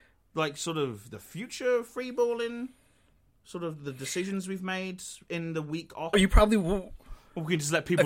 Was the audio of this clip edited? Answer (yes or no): yes